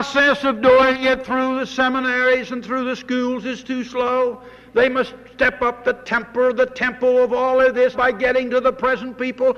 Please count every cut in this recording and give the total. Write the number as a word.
one